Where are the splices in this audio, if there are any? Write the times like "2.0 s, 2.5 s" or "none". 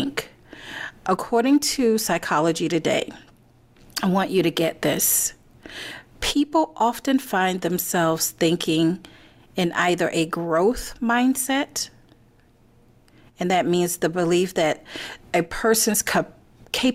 none

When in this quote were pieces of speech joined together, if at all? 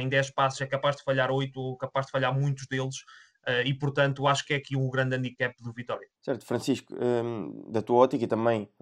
6.2 s

